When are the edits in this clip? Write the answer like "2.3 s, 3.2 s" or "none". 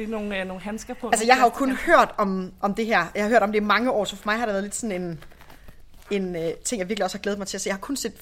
none